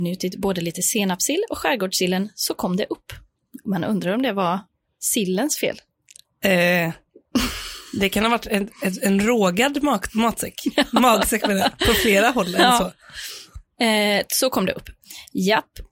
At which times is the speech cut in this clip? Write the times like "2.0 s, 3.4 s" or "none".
none

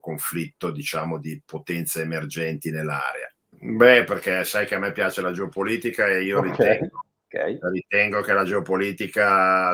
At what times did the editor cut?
3.5 s

